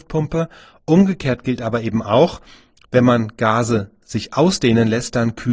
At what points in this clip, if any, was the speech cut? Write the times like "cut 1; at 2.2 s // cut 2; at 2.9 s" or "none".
none

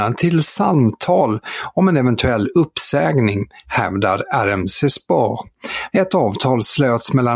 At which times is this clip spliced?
cut 1; at 5.9 s

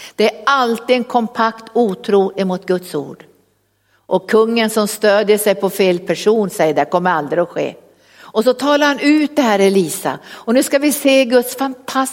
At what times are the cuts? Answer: none

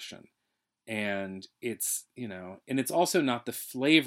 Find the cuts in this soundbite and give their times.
none

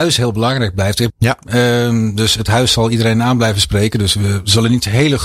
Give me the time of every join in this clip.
cut 1; at 1.1 s

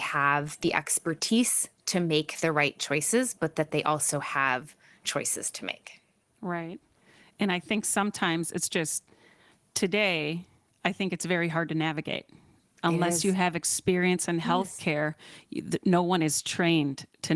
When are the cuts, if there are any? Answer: none

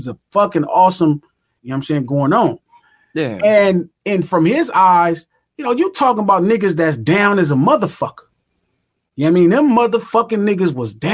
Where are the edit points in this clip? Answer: cut 1; at 1.6 s

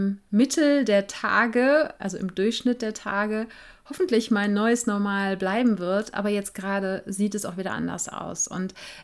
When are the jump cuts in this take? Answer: none

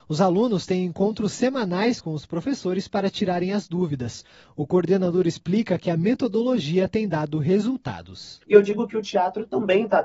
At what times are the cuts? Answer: cut 1; at 8.4 s

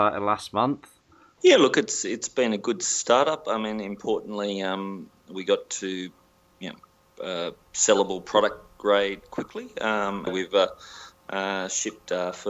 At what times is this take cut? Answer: cut 1; at 1.4 s // cut 2; at 10.3 s

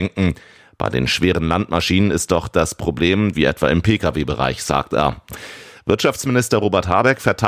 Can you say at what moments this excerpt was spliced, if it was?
cut 1; at 3.3 s

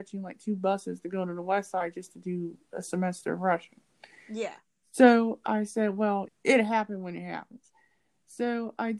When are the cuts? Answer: cut 1; at 6.3 s

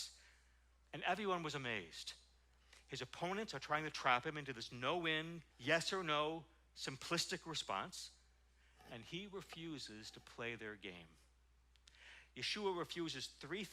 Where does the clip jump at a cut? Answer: cut 1; at 5.5 s

